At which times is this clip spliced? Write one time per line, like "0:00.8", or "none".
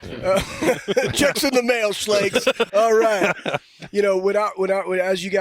0:02.7